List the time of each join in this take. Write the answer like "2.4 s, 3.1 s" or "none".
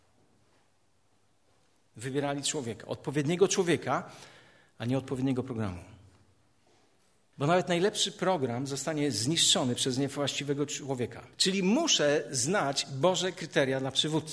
7.3 s, 11.3 s